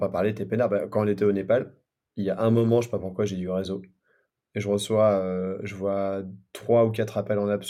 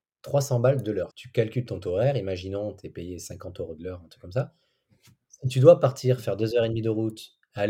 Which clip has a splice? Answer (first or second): second